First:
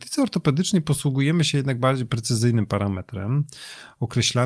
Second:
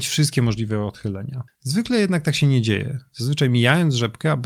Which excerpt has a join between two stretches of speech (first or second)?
second